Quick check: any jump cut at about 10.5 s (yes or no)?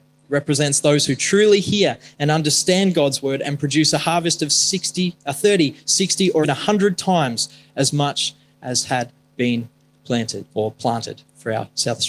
yes